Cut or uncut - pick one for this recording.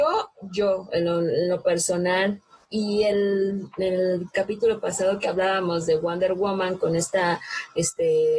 uncut